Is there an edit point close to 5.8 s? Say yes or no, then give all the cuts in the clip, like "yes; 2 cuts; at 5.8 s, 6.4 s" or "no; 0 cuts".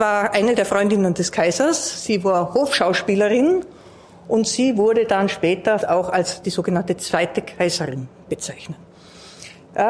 yes; 1 cut; at 5.8 s